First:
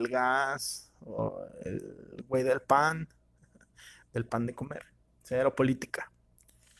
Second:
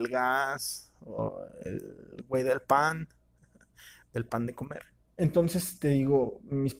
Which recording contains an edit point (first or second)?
second